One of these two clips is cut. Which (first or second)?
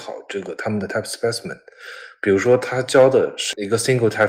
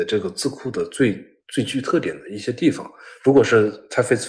second